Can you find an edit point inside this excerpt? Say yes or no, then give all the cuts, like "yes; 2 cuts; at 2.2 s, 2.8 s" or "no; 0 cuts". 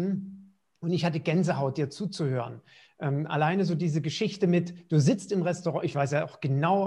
no; 0 cuts